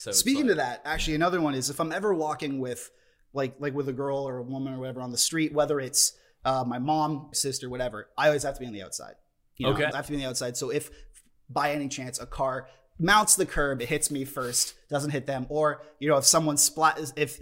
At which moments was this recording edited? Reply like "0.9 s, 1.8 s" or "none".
7.3 s, 9.9 s